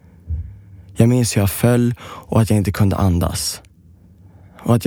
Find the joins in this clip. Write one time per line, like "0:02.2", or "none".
none